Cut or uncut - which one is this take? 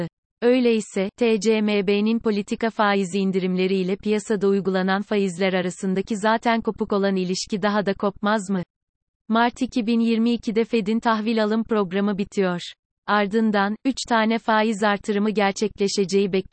uncut